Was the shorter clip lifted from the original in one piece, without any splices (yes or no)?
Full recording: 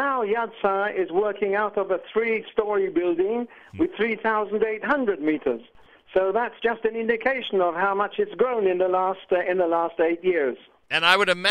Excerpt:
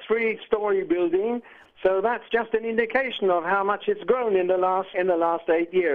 no